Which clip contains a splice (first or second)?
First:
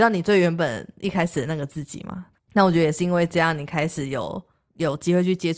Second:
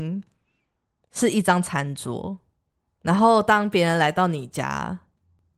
first